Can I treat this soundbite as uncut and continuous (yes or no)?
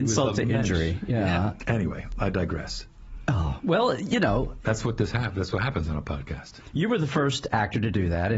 no